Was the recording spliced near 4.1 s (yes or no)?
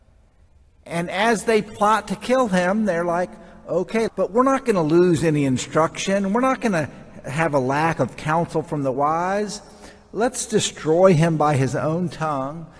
yes